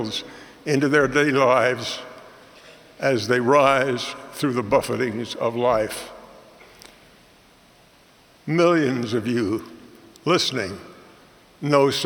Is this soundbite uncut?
yes; 0 cuts

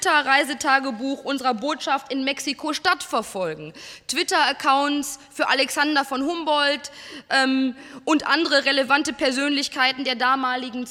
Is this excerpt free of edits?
yes; 0 cuts

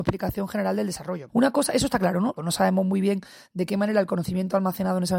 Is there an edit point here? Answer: yes; 2 cuts; at 1.3 s, 2.4 s

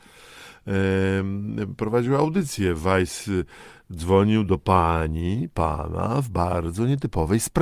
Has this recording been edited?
no; 0 cuts

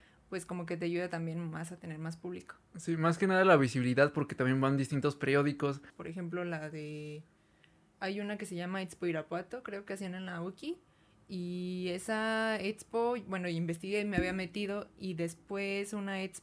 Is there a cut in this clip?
yes; 1 cut; at 5.9 s

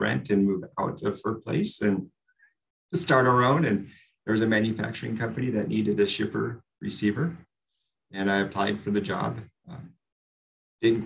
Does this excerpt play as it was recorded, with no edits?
yes; 0 cuts

